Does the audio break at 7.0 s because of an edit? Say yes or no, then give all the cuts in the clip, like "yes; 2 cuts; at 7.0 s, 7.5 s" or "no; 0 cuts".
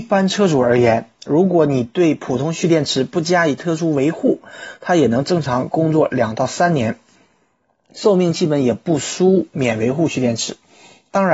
no; 0 cuts